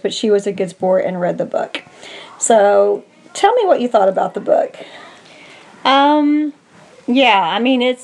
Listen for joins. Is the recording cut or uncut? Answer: uncut